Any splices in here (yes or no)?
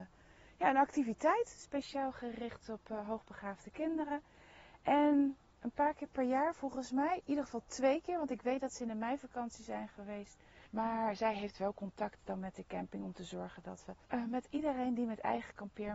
yes